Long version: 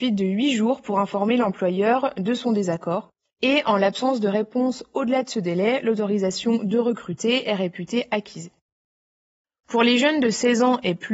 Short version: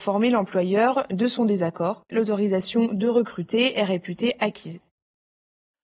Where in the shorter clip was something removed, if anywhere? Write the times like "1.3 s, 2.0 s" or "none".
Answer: 2.1 s